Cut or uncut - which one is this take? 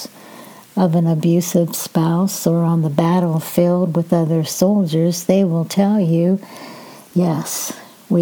uncut